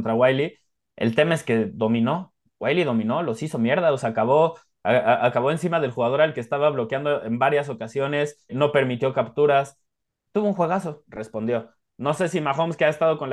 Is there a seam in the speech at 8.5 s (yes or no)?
yes